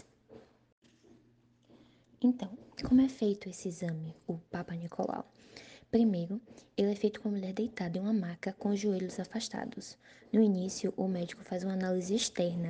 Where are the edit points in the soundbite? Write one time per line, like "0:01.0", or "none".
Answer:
none